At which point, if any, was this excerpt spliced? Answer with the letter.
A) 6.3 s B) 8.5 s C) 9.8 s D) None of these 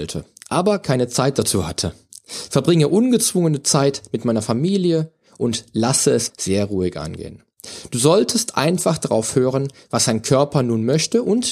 A